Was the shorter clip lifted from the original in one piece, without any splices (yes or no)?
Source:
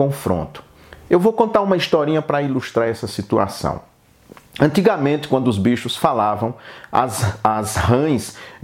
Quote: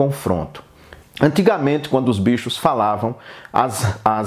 no